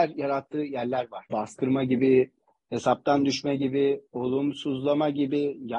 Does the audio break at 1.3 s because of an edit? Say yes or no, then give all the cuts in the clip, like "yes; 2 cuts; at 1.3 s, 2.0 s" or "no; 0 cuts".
yes; 1 cut; at 1.3 s